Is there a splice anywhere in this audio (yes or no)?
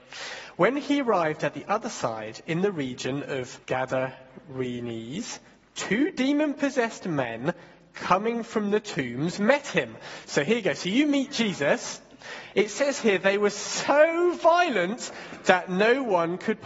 yes